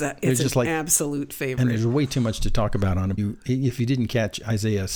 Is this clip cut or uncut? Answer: cut